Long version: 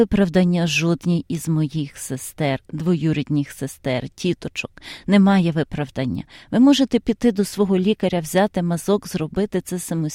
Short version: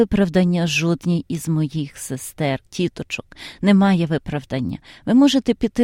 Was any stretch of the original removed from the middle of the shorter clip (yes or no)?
yes